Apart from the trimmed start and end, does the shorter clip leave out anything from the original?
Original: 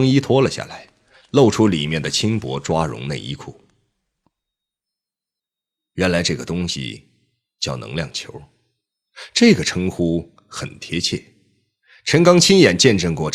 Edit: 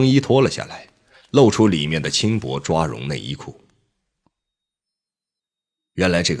no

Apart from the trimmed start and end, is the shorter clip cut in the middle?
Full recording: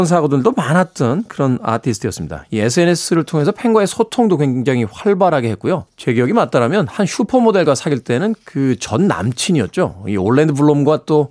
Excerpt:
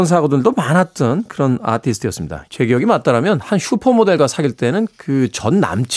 yes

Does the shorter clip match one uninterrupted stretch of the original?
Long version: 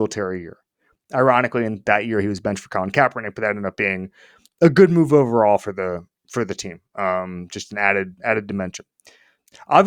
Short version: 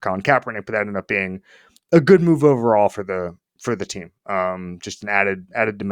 yes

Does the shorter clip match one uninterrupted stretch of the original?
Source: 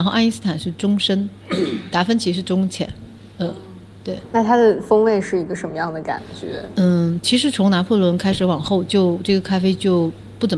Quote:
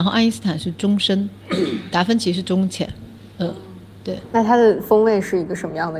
yes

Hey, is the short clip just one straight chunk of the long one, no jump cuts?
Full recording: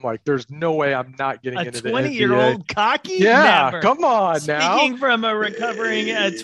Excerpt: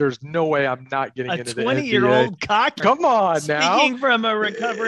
no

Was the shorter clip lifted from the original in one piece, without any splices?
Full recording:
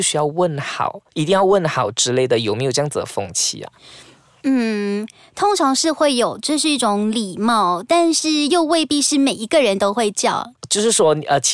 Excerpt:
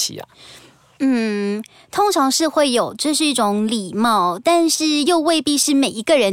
yes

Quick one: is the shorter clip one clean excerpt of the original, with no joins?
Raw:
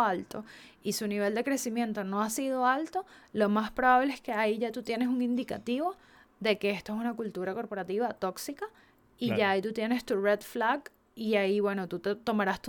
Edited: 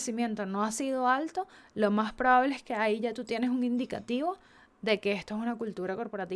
yes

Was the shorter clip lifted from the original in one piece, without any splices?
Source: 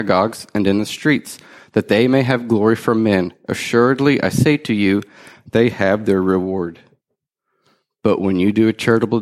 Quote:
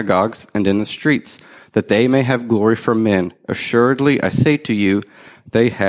yes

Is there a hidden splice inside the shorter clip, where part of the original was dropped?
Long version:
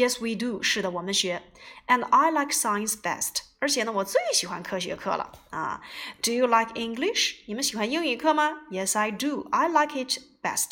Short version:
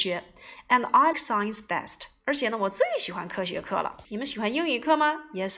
yes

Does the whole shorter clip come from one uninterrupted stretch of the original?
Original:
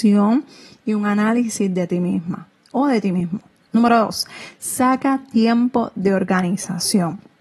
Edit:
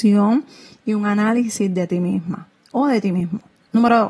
yes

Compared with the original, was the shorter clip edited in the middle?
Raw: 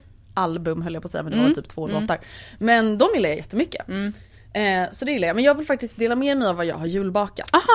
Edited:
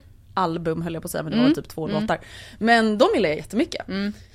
no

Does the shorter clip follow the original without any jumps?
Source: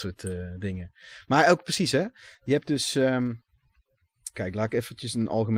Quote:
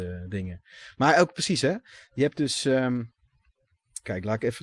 yes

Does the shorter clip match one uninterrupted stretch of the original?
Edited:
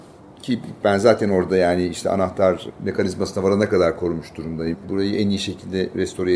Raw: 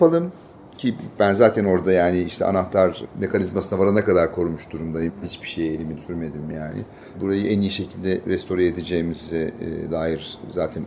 no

